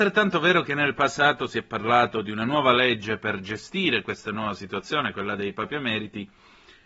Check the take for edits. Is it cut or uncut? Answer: uncut